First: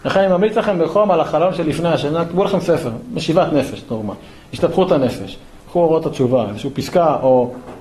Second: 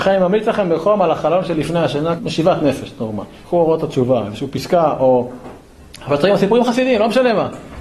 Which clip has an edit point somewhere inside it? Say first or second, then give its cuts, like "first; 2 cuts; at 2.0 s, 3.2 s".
second; 2 cuts; at 2.2 s, 3.4 s